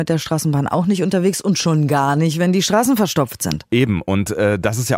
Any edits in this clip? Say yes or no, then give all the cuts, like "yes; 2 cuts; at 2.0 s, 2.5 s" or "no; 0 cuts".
no; 0 cuts